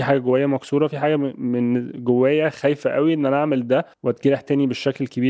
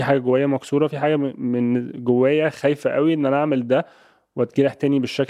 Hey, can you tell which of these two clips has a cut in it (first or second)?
first